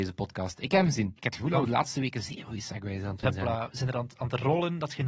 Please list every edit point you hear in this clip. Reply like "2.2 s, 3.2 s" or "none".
1.2 s